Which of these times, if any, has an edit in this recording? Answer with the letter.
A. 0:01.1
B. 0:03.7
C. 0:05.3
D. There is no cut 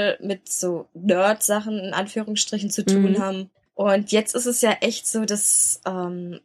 B